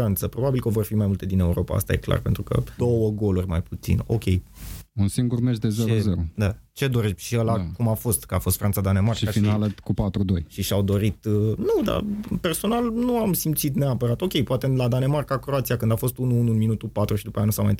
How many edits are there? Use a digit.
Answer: 1